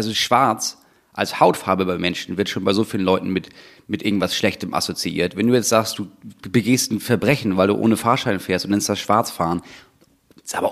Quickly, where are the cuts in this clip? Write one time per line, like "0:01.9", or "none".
none